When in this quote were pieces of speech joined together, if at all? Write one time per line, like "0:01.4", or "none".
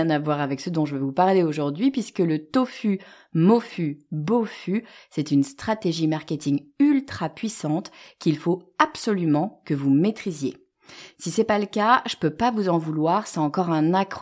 none